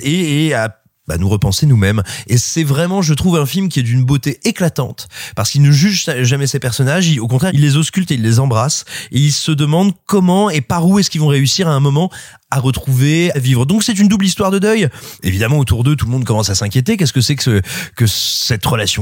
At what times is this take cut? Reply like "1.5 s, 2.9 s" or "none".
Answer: 7.5 s, 13.3 s, 15.2 s